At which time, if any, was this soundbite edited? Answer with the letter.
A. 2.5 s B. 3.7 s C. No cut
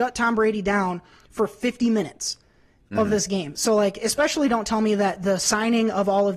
C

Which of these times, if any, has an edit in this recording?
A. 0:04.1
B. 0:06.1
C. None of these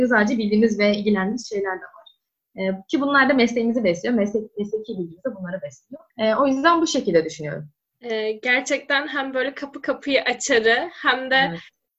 B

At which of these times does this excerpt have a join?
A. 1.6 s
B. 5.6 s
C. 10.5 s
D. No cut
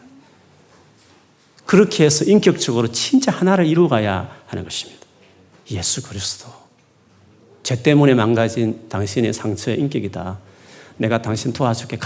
B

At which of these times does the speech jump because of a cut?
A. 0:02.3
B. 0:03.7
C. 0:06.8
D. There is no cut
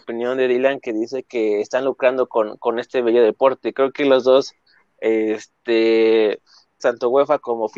C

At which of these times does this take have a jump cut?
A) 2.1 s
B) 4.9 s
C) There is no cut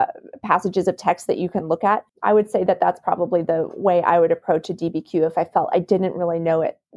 A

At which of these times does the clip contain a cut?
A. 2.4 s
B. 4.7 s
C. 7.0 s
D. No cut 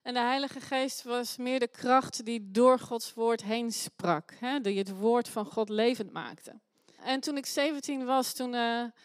C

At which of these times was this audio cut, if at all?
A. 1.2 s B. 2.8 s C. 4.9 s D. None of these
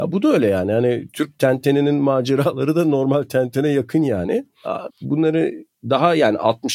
C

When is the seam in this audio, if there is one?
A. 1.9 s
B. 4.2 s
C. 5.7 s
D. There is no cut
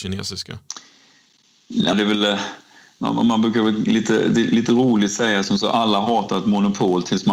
A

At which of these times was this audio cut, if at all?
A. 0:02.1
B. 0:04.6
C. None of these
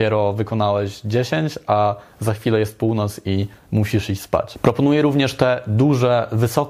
C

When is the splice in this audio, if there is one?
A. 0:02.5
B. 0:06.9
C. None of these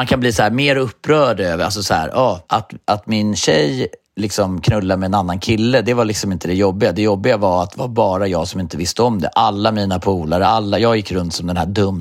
A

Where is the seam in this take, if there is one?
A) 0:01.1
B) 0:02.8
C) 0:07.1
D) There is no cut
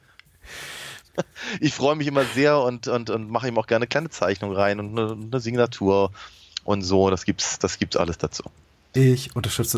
A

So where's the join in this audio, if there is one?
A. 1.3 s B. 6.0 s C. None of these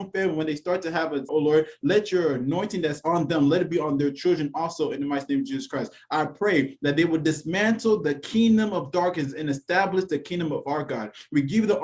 A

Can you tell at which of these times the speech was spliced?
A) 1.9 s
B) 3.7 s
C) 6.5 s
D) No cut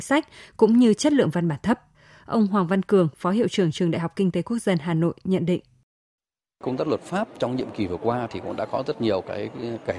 D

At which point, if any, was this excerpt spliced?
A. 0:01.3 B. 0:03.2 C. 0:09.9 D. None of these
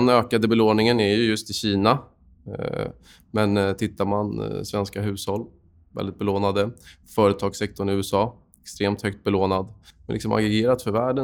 C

